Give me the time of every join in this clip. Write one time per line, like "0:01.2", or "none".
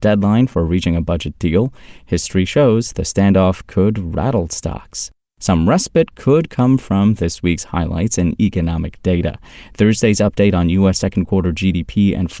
none